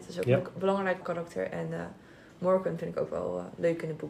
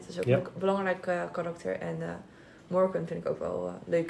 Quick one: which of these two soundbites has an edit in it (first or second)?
first